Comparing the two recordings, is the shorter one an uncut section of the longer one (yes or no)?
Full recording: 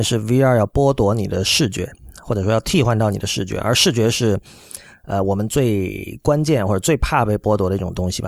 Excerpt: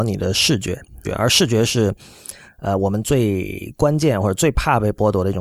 no